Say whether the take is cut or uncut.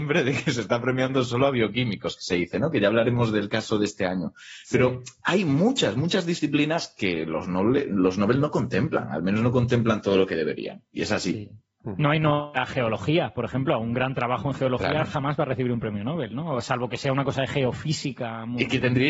uncut